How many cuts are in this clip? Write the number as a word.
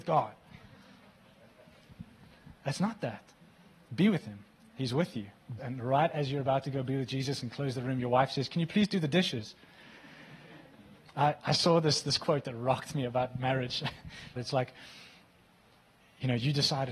three